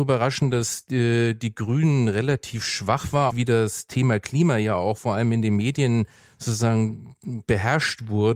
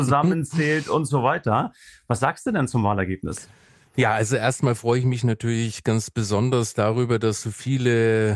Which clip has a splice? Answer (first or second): first